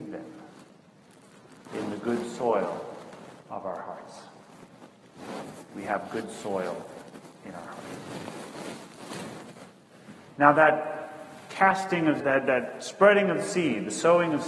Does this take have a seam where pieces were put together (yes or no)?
yes